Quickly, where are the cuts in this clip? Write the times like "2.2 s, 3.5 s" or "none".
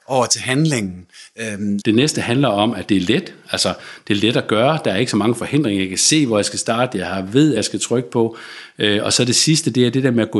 1.8 s, 7.6 s

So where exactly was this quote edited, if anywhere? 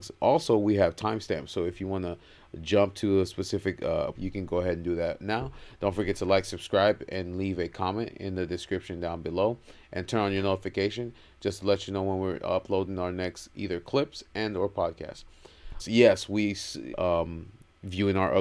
4.1 s, 15.8 s, 16.9 s

